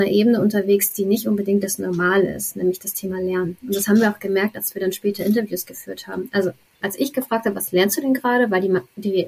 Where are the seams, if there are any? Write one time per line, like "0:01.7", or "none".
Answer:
none